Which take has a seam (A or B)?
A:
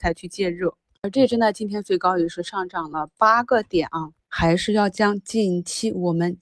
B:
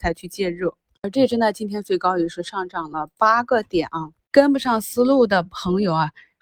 A